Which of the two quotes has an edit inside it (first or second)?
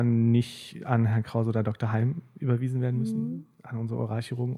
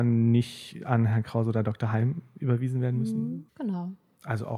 second